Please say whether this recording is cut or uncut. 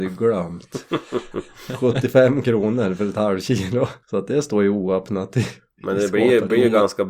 cut